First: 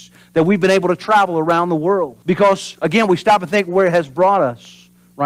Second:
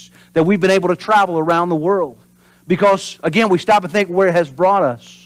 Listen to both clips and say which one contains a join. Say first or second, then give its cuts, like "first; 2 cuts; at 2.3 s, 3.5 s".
first; 1 cut; at 2.2 s